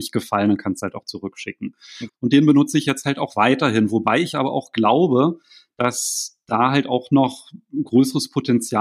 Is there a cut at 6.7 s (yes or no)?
no